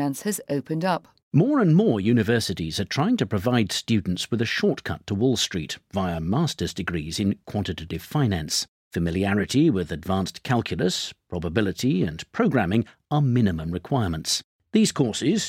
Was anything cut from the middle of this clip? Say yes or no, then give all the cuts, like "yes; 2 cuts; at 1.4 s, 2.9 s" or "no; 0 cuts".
no; 0 cuts